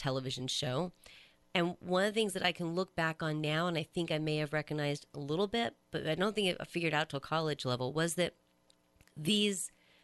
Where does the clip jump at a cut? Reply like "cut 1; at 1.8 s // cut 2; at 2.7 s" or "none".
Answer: cut 1; at 5.8 s